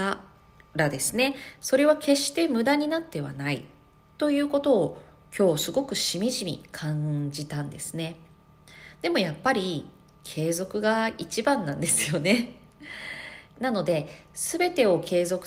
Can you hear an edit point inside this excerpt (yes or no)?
yes